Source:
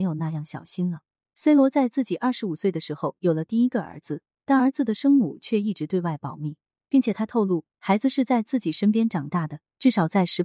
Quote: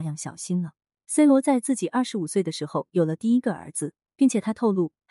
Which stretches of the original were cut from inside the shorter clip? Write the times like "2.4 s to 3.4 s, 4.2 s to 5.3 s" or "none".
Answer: 4.4 s to 6.8 s